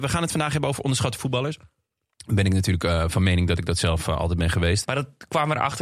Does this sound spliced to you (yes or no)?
yes